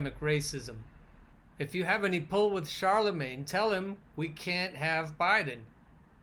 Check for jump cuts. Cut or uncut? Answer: uncut